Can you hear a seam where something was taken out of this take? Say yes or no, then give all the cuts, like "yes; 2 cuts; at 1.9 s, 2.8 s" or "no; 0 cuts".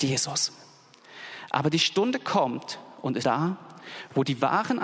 yes; 1 cut; at 3.2 s